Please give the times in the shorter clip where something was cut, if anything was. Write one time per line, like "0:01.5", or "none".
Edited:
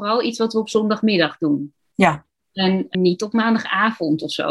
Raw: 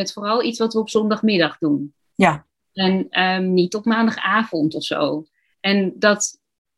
0:02.9